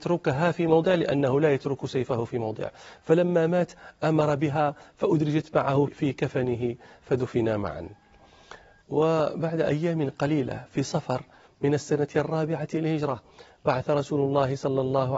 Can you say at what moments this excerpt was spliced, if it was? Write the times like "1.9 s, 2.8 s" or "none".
5.9 s